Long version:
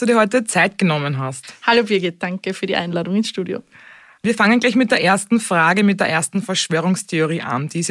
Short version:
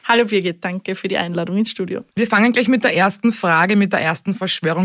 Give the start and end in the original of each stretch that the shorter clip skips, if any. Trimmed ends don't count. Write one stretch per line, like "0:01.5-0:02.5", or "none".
0:03.7-0:04.2